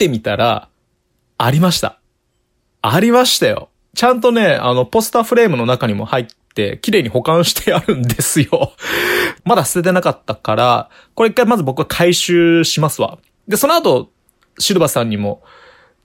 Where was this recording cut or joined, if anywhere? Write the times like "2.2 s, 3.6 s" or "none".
9.4 s